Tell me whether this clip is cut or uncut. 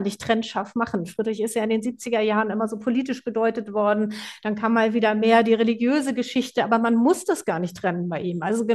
uncut